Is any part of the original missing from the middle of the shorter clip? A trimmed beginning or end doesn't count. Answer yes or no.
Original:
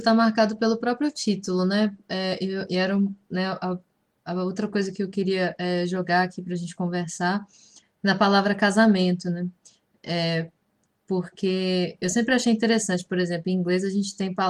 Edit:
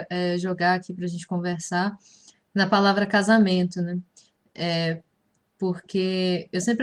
no